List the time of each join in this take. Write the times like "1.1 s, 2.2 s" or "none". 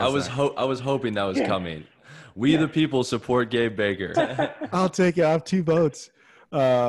4.1 s

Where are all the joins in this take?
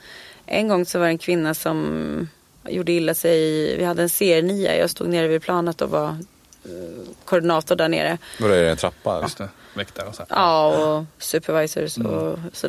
2.7 s, 9.2 s

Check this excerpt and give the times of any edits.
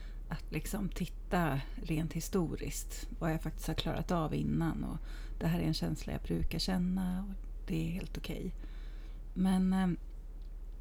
none

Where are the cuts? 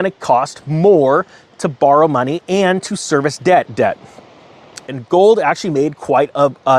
3.7 s, 4.9 s

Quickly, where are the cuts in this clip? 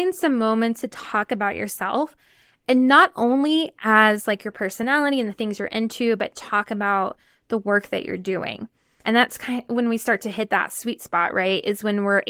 9.0 s

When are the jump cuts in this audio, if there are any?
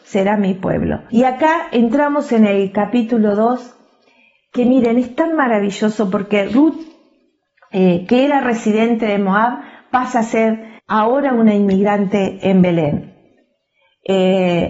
1.1 s, 10.8 s

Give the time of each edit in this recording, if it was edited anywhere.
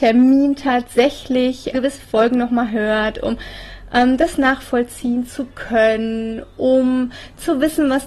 1.7 s

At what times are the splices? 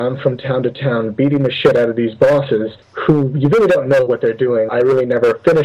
2.8 s, 4.7 s

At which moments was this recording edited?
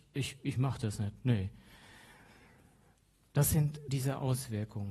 3.9 s

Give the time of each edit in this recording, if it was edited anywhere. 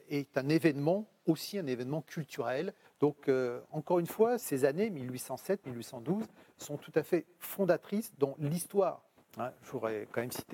2.8 s, 4.4 s

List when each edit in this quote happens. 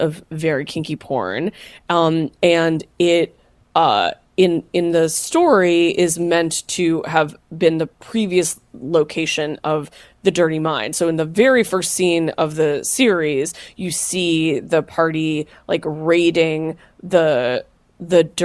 none

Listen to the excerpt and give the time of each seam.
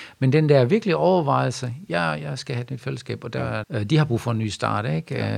3.6 s

